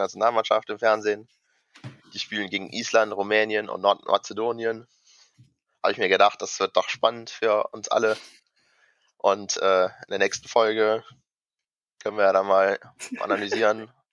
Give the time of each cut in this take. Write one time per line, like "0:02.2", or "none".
none